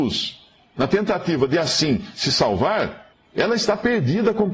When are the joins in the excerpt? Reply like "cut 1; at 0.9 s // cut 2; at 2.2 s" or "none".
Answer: none